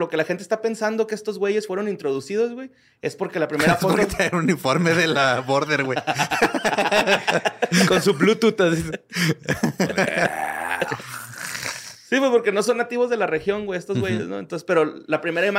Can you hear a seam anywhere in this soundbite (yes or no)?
no